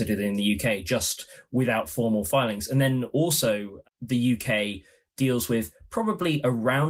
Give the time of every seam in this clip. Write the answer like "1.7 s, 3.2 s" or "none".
none